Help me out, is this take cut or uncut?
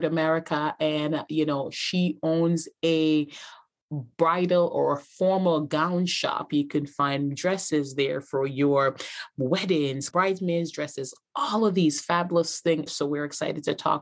cut